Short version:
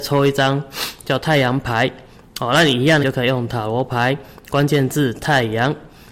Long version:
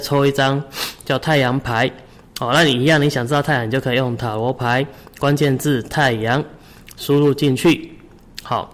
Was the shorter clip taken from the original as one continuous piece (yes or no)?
no